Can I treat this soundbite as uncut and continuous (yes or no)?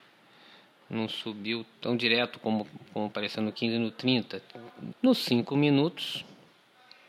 no